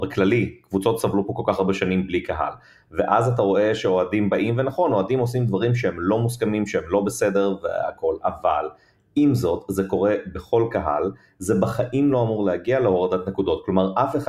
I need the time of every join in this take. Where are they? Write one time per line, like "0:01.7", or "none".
none